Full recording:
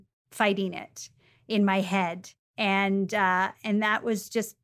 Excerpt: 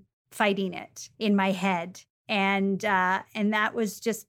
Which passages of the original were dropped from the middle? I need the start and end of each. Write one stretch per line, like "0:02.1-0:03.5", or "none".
0:01.1-0:01.4